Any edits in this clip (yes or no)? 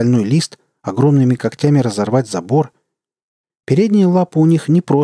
yes